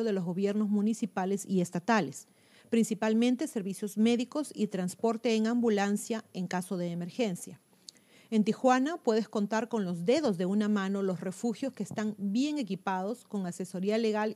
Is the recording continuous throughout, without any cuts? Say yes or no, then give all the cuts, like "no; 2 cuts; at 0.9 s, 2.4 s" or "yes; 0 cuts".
yes; 0 cuts